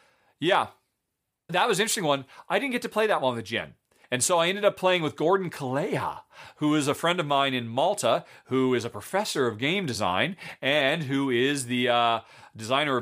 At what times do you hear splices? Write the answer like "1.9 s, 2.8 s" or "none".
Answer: 1.5 s, 4.0 s